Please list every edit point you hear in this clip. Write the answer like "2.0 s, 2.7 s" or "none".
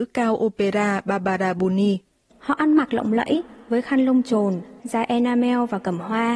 2.3 s, 4.8 s